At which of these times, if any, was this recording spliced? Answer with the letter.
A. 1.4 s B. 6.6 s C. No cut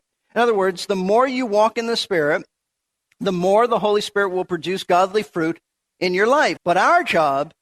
B